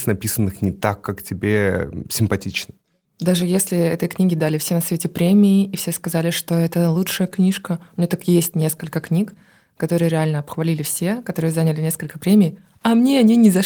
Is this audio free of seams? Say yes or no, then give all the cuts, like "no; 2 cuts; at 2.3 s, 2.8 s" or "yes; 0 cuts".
yes; 0 cuts